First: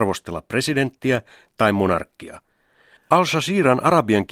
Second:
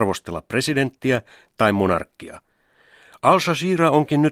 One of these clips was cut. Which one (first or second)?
first